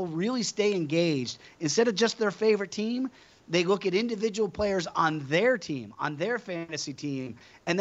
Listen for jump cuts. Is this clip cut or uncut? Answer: uncut